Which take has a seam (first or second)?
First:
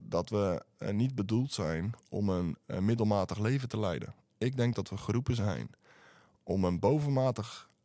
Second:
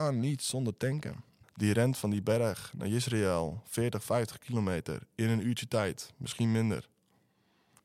second